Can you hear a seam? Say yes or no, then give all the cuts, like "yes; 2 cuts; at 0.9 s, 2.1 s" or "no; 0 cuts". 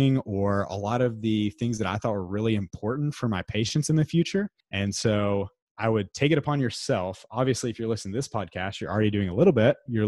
no; 0 cuts